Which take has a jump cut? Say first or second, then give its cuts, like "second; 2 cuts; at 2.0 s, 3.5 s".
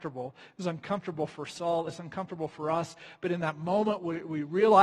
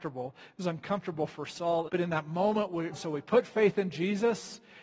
second; 2 cuts; at 1.9 s, 2.9 s